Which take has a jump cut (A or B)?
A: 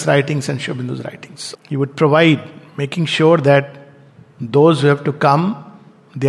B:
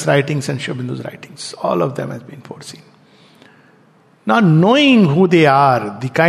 A